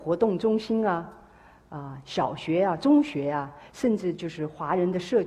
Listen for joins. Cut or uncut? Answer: uncut